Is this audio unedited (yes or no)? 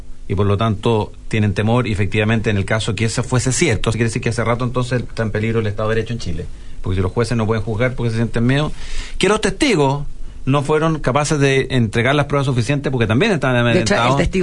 no